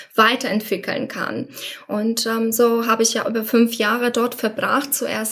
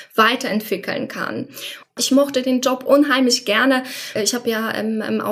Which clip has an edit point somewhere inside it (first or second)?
second